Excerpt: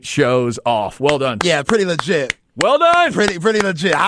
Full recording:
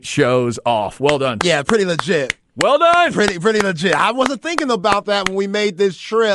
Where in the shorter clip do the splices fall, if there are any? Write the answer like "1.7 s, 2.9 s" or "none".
none